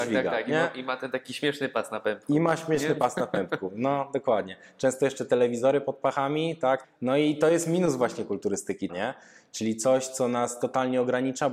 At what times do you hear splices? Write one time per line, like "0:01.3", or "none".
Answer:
0:06.8
0:08.9